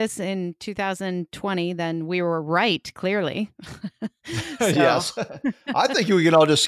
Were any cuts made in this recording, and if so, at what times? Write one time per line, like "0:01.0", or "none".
none